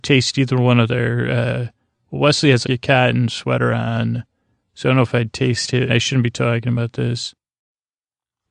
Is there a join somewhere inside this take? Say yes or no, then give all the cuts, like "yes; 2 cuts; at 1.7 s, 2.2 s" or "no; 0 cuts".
yes; 2 cuts; at 2.6 s, 5.9 s